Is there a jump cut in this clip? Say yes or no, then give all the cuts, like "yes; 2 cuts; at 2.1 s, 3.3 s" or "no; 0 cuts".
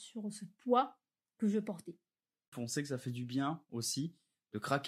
yes; 1 cut; at 2.5 s